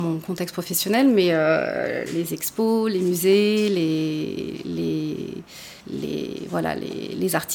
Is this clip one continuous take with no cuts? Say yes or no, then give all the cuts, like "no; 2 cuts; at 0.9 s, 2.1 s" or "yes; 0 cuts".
no; 1 cut; at 5.8 s